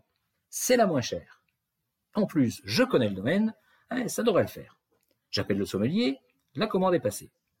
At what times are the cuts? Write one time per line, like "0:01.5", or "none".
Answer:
none

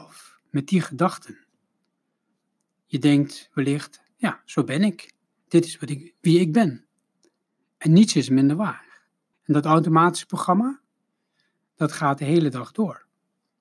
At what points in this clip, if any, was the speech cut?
0:09.3

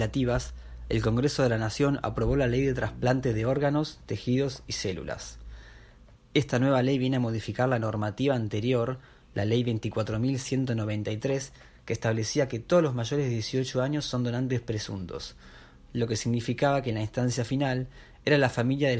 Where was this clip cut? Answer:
none

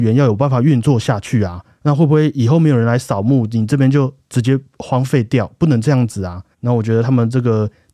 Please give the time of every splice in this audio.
0:06.5

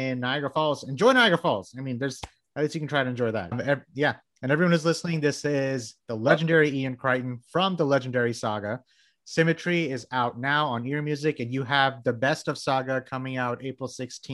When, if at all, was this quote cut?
0:03.5

